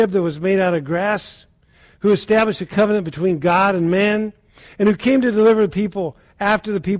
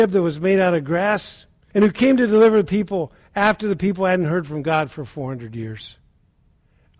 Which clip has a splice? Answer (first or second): second